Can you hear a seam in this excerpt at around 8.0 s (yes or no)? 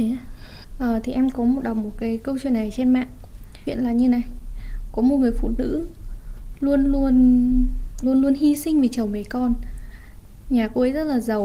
yes